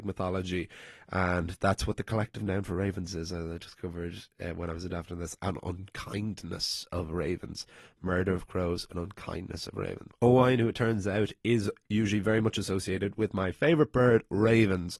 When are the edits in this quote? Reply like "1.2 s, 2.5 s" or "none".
10.1 s